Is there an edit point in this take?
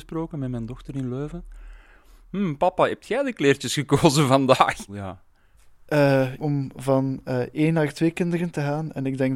yes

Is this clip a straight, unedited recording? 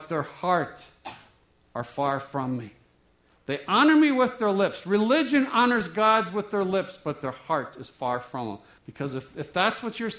no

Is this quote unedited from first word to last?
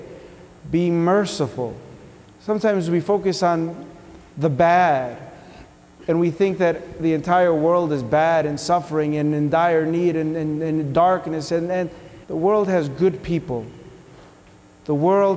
no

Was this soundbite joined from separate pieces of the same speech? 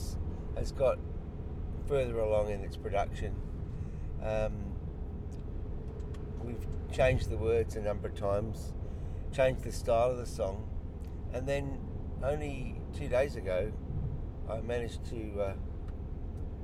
no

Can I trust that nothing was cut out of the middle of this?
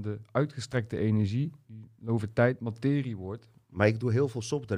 no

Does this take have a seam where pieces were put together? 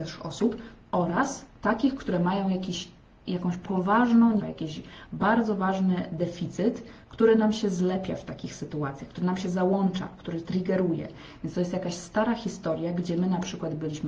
yes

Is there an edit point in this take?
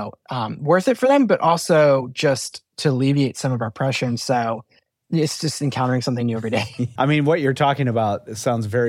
yes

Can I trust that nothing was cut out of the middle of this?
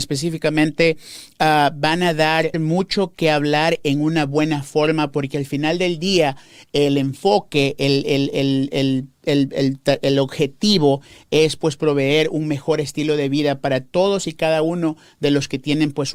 no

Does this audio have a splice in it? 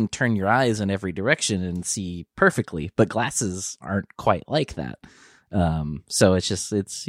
no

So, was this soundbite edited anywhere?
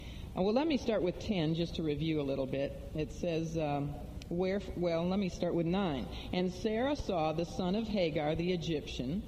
no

